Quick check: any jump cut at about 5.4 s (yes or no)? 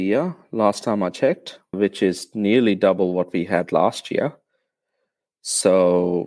no